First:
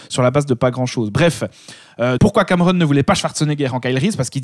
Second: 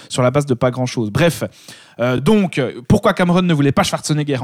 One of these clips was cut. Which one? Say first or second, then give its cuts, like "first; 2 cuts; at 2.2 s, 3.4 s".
first; 1 cut; at 2.2 s